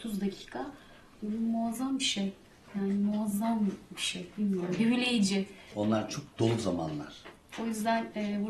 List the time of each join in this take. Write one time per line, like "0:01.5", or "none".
0:07.5